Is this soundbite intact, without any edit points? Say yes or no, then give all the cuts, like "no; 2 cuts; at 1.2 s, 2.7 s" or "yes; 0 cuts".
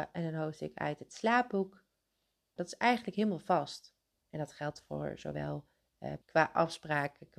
no; 3 cuts; at 2.6 s, 4.1 s, 6.2 s